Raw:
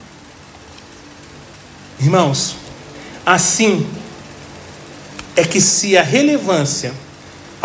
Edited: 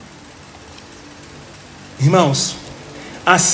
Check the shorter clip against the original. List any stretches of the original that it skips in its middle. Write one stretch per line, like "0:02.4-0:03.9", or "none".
none